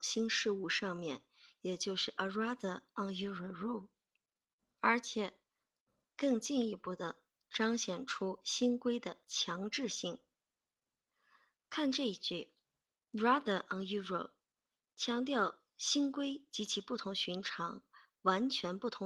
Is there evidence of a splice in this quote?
no; 0 cuts

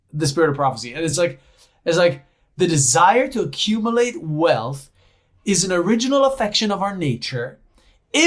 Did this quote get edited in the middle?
no; 0 cuts

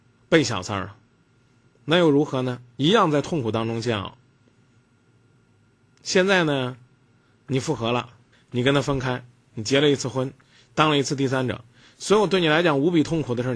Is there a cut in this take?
yes; 1 cut; at 8.3 s

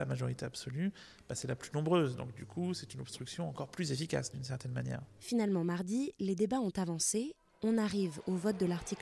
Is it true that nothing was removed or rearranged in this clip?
yes; 0 cuts

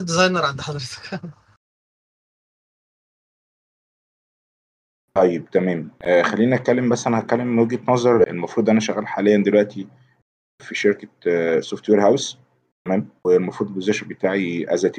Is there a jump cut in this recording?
yes; 2 cuts; at 8.3 s, 13.2 s

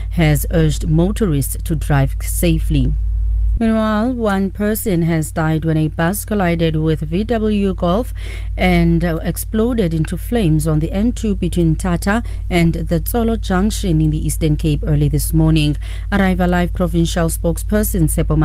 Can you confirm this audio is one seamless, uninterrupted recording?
no; 1 cut; at 3.6 s

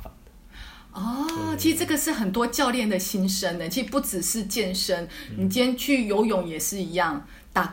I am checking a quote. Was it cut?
no; 0 cuts

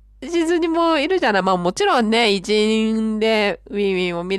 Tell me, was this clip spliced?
no; 0 cuts

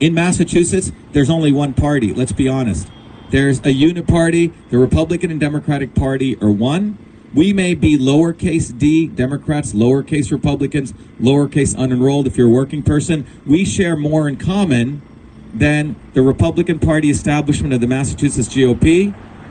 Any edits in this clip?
no; 0 cuts

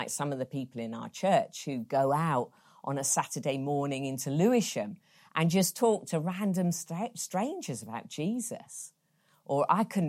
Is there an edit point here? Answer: no; 0 cuts

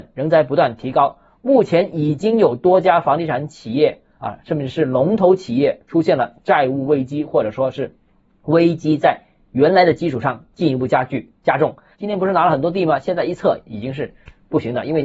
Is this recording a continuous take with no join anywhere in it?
no; 1 cut; at 11.9 s

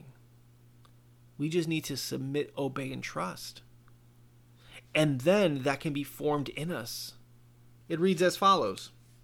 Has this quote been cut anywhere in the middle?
yes; 1 cut; at 7.8 s

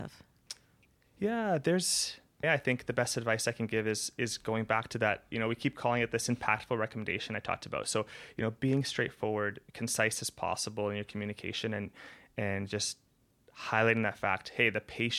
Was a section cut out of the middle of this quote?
yes; 2 cuts; at 2.4 s, 9.7 s

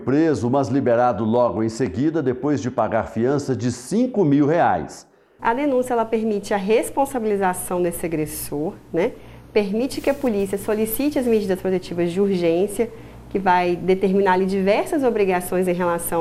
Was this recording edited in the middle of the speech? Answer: yes; 1 cut; at 5.4 s

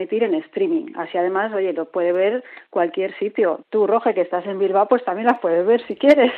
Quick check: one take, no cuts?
yes; 0 cuts

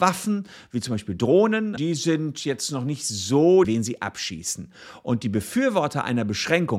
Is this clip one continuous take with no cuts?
no; 2 cuts; at 1.8 s, 3.6 s

